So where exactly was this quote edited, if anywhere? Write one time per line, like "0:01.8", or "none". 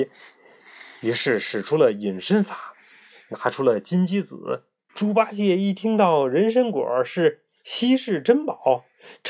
0:04.9